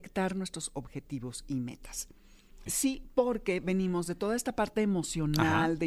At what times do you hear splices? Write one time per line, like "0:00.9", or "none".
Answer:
0:02.7